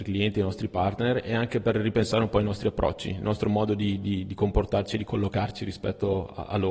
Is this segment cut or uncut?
uncut